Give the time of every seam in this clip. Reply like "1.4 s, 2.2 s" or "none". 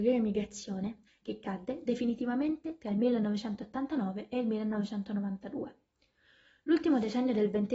1.1 s